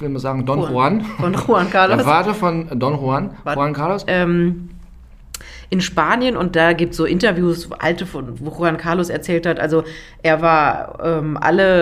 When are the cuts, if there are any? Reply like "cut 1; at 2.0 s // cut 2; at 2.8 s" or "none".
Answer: cut 1; at 4.1 s